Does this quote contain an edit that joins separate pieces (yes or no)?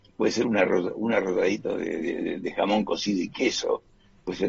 no